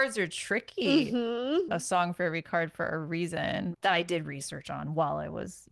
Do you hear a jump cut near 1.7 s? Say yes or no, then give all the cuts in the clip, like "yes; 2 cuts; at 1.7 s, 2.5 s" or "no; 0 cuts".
yes; 2 cuts; at 1.7 s, 3.7 s